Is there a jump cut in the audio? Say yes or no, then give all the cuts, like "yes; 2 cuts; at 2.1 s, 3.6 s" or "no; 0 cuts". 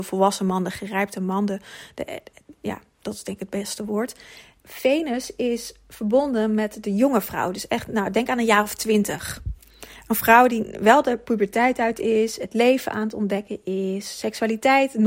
no; 0 cuts